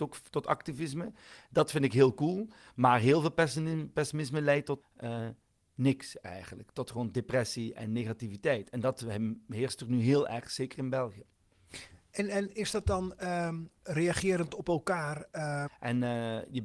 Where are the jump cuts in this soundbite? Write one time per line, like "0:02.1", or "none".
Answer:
0:04.8
0:15.7